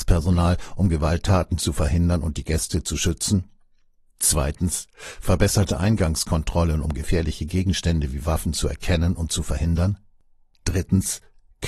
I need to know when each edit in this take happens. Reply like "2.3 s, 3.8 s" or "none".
none